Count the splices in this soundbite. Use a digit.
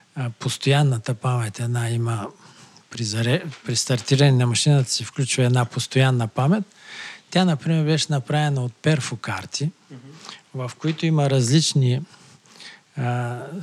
0